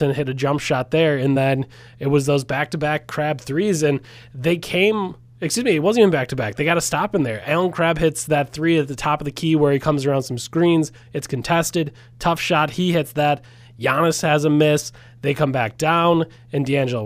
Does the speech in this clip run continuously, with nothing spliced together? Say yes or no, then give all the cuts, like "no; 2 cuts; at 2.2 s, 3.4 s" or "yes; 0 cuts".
yes; 0 cuts